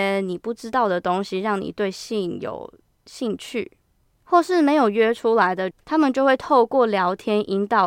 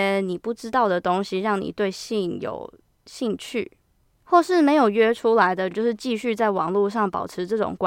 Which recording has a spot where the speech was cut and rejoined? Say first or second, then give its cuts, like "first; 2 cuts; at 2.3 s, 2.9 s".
first; 1 cut; at 5.7 s